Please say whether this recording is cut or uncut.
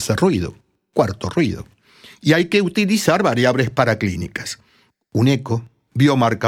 uncut